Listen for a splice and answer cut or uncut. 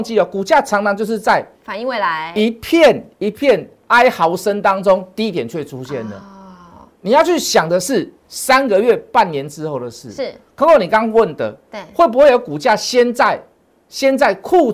cut